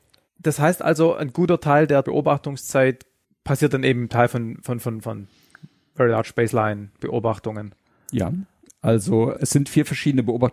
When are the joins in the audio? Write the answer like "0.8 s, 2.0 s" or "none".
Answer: 5.0 s, 9.3 s